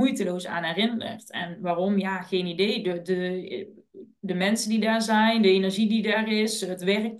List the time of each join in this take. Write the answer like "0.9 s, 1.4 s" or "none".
none